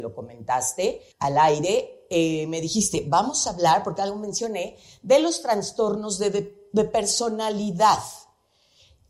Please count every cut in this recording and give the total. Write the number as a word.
one